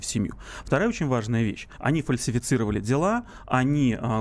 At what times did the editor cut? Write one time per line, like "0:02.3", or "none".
0:01.8